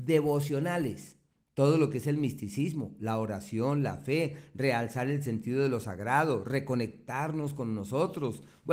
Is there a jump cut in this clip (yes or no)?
no